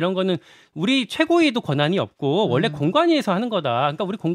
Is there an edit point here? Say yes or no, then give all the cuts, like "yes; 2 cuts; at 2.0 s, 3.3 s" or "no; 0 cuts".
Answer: no; 0 cuts